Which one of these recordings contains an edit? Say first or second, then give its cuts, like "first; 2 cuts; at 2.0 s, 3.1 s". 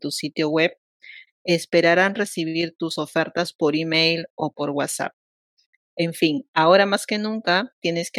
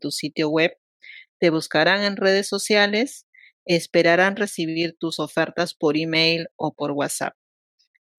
first; 1 cut; at 1.3 s